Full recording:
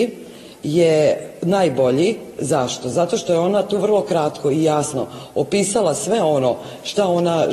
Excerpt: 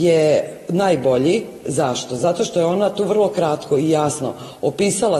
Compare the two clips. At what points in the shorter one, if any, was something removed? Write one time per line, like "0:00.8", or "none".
none